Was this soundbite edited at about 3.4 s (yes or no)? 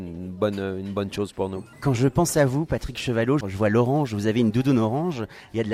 yes